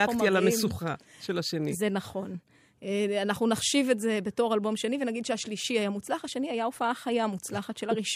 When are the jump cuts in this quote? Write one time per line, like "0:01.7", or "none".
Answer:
none